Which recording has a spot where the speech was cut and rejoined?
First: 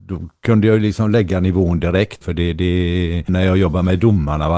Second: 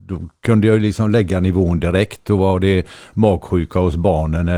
first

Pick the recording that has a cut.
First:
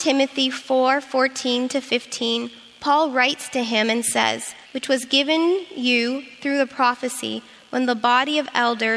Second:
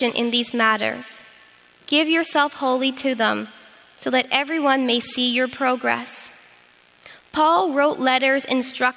first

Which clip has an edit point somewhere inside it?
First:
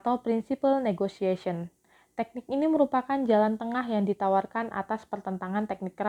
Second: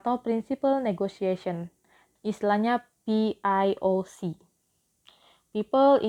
second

